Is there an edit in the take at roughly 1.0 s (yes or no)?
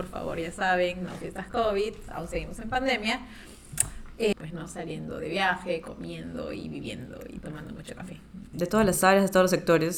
no